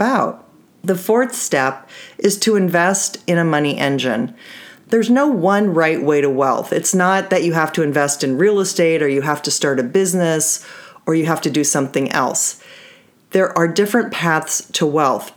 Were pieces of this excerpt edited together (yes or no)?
no